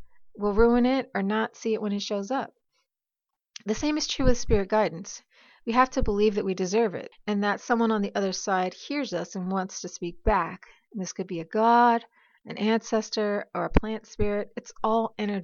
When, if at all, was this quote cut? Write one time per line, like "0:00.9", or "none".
0:07.1